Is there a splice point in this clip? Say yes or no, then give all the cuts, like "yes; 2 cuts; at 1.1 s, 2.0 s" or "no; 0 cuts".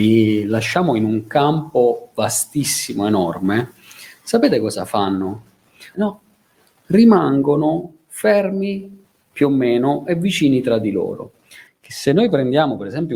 yes; 2 cuts; at 5.9 s, 11.7 s